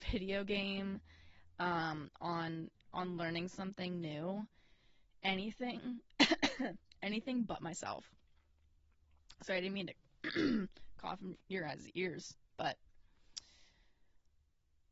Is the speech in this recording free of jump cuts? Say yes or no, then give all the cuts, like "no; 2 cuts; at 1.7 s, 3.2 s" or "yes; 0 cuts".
yes; 0 cuts